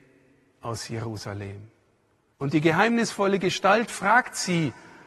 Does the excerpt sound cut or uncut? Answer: cut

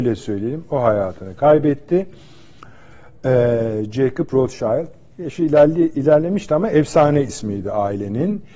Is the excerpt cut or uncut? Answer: uncut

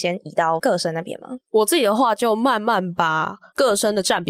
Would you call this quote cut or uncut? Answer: uncut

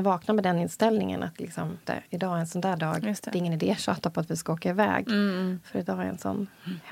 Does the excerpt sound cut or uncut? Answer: cut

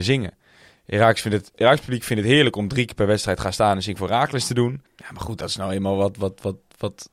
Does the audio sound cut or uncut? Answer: cut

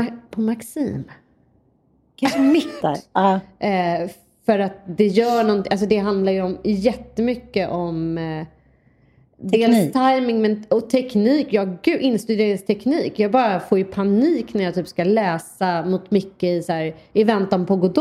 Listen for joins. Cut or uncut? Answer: cut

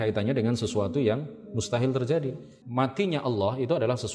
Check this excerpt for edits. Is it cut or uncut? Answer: cut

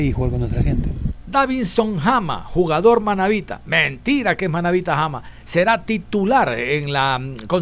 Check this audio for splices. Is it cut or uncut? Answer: uncut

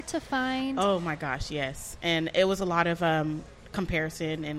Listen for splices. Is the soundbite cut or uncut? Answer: uncut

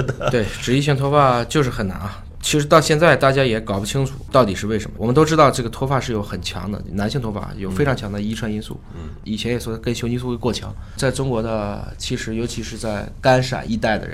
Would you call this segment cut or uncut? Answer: uncut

